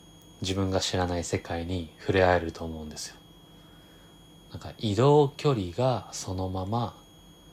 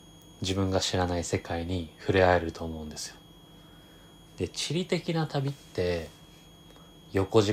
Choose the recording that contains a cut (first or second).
second